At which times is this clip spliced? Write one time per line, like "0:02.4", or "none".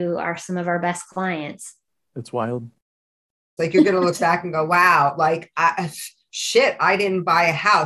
0:03.6